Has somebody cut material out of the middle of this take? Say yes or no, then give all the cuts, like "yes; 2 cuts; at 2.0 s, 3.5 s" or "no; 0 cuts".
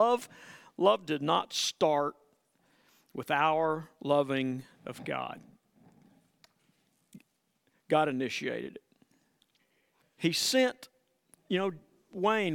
yes; 1 cut; at 10.0 s